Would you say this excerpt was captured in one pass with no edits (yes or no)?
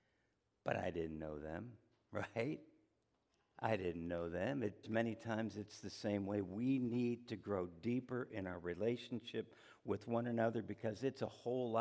no